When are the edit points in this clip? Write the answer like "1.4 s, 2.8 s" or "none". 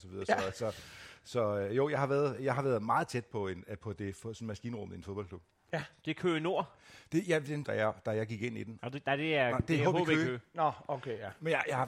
7.6 s, 8.8 s

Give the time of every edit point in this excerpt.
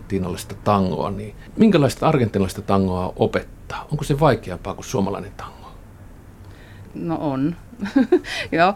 none

